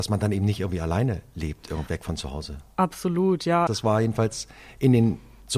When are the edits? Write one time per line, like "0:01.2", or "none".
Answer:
0:01.9
0:03.7